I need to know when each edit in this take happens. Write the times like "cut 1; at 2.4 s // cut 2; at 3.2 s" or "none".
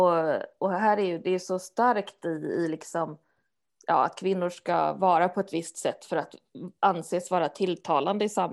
cut 1; at 3.7 s